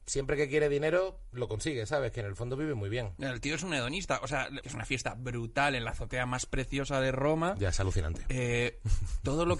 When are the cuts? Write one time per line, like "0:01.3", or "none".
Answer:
0:04.6